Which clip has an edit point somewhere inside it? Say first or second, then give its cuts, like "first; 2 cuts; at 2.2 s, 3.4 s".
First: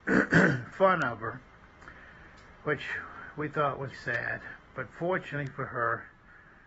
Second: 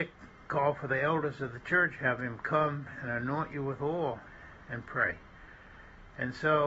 first; 2 cuts; at 2.6 s, 3.9 s